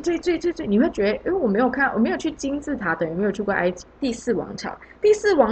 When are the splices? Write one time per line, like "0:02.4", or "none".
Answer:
0:03.8